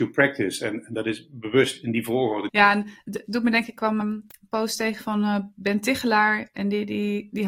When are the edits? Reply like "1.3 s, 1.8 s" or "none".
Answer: 2.5 s, 4.0 s